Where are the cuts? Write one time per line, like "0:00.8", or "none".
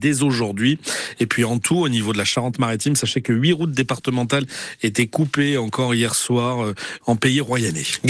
0:07.0